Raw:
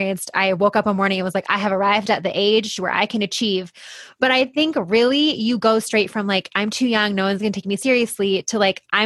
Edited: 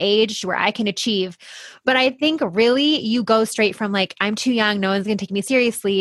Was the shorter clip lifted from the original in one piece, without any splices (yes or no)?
yes